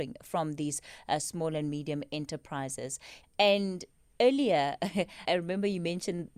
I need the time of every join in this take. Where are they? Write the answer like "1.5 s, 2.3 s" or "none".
3.2 s, 5.3 s